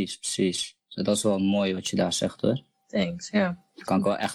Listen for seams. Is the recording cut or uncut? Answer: uncut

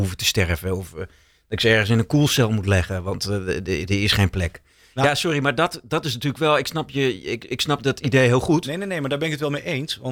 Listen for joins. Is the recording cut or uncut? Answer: uncut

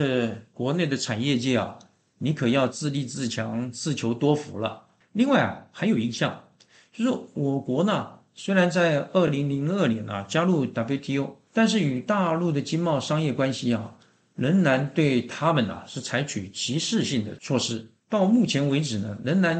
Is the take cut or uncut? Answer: uncut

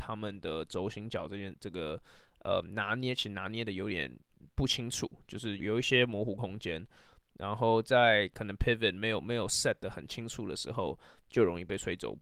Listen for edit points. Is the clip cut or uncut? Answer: cut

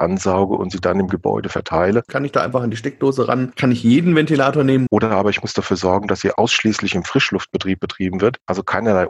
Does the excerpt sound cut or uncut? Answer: cut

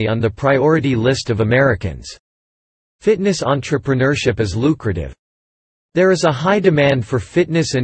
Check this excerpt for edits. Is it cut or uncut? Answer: uncut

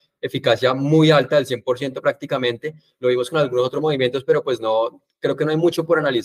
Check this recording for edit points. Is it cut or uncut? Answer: uncut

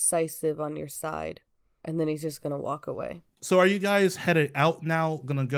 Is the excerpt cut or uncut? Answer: uncut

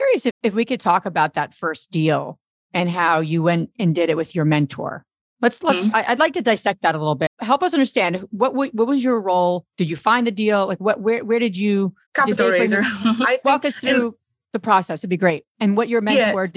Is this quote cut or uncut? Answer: cut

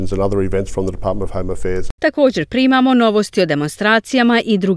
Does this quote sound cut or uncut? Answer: cut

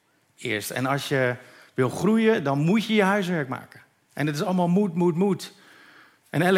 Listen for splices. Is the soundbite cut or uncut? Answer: uncut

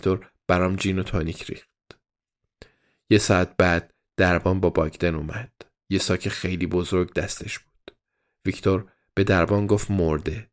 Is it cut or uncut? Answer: uncut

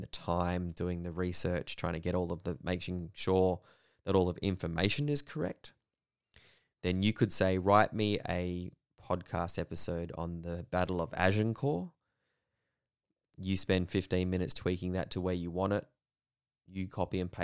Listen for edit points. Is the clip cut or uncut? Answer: uncut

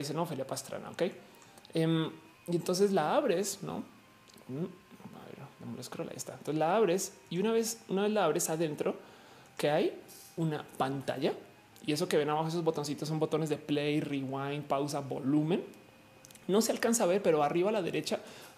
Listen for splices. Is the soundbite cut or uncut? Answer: uncut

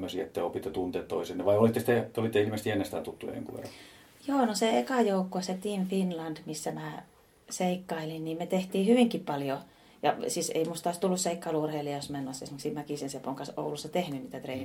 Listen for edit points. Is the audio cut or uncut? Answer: uncut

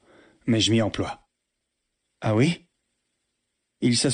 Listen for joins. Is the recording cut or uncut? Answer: cut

